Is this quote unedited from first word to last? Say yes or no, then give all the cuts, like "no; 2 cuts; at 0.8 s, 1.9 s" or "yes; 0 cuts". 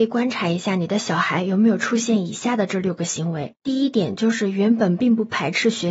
yes; 0 cuts